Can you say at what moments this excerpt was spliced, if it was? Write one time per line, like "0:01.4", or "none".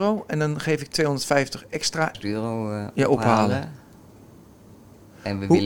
0:02.1